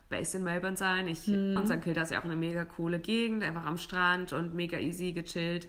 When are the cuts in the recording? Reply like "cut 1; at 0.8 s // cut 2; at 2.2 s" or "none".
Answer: cut 1; at 1.6 s